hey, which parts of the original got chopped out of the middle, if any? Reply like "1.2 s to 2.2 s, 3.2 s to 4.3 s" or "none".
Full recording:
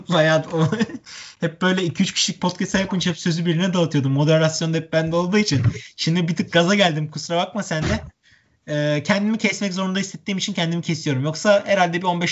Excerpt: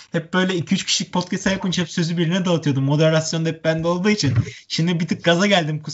none